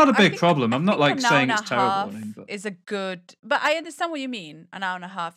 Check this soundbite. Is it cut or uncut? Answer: uncut